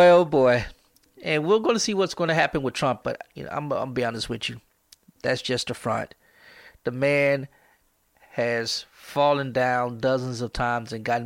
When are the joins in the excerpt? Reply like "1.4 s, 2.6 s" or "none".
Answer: 3.0 s